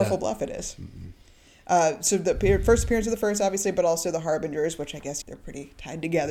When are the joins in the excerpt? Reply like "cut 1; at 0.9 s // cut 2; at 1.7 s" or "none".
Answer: cut 1; at 5.2 s